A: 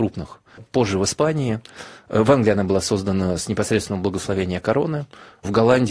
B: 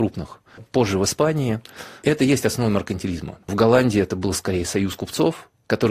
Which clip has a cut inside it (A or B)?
B